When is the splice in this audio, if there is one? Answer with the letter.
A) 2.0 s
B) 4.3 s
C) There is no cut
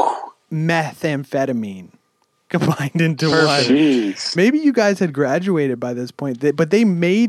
B